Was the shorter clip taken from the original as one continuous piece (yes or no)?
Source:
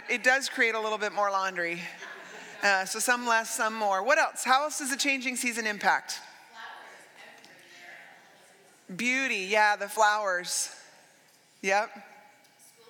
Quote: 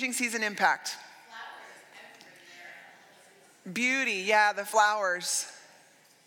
yes